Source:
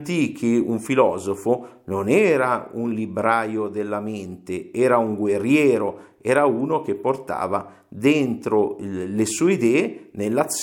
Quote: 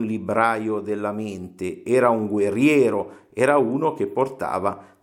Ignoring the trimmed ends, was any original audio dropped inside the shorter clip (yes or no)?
no